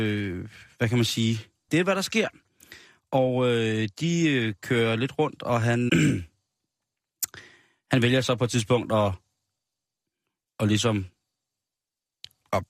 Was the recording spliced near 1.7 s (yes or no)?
yes